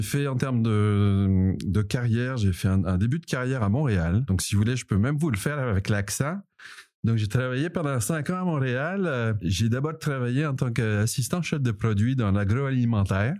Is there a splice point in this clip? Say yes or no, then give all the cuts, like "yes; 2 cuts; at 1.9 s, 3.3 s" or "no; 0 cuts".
no; 0 cuts